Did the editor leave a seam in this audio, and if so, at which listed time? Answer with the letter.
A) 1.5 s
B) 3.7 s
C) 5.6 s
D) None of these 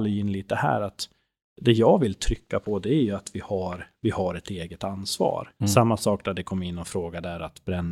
C